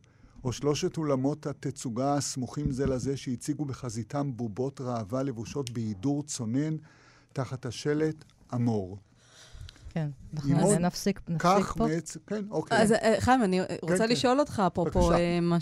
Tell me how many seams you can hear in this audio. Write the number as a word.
zero